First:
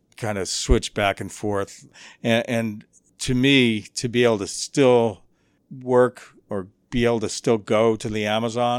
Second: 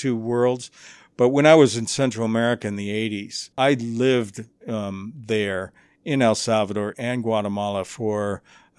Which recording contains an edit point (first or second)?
second